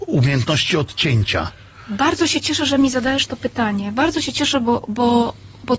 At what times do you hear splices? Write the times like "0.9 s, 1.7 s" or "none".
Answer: none